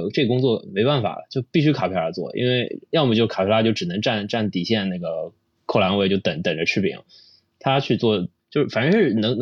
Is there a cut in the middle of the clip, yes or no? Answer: yes